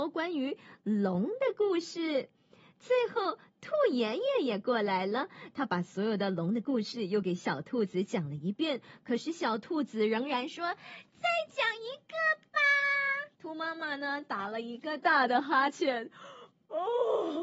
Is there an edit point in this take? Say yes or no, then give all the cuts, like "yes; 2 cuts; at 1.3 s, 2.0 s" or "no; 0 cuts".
yes; 2 cuts; at 13.3 s, 15.0 s